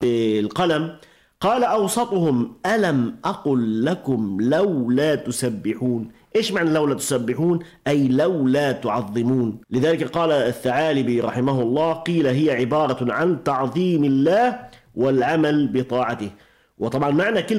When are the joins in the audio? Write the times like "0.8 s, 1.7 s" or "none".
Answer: 9.6 s